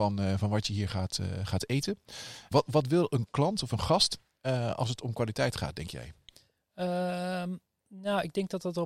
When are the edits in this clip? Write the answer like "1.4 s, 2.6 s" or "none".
2.5 s